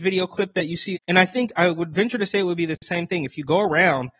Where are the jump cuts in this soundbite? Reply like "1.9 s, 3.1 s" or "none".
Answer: 0.9 s